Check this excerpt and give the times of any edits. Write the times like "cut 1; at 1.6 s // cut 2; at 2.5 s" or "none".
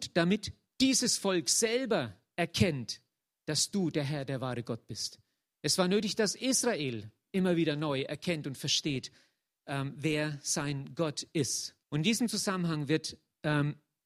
cut 1; at 11.8 s